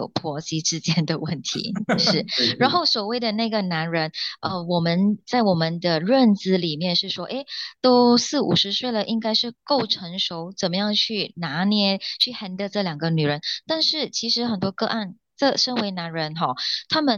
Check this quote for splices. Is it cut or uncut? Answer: uncut